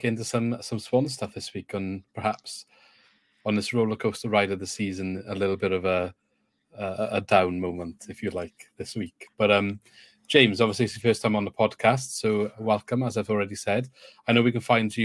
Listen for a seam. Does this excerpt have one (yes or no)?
no